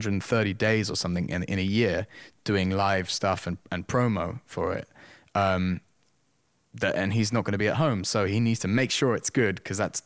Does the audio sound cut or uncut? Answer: uncut